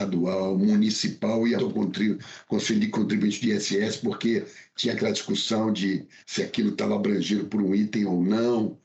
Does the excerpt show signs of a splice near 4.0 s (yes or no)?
no